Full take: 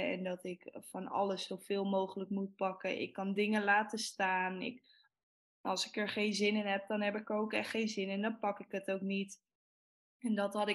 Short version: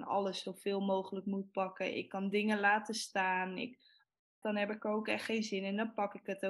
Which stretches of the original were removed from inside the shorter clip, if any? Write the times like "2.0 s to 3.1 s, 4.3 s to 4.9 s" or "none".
5.5 s to 6.9 s